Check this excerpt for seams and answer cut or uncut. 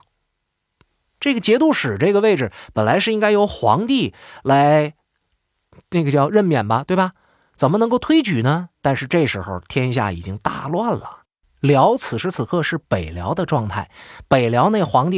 uncut